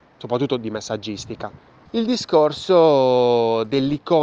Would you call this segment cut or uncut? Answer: cut